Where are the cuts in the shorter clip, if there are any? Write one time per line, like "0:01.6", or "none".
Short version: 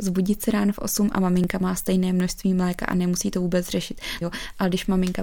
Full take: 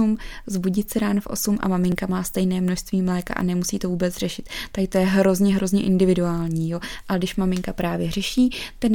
0:04.2